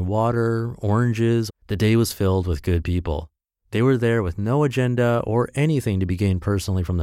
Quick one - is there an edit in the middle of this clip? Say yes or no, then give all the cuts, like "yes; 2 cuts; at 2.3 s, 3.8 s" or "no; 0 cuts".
yes; 1 cut; at 1.5 s